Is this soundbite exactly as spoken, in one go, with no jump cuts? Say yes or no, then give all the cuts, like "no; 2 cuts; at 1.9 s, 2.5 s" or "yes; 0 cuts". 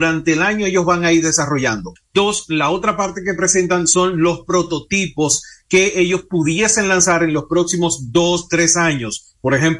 no; 1 cut; at 2.0 s